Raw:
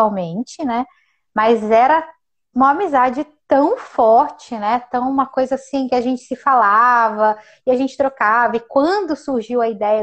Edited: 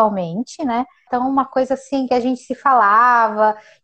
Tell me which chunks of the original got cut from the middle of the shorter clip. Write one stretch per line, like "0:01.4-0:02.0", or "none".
0:01.1-0:04.9